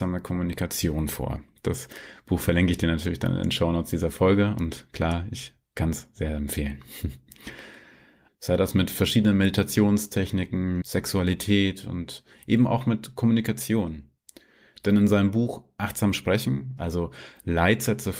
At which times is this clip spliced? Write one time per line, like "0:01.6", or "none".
0:08.3
0:10.8
0:16.8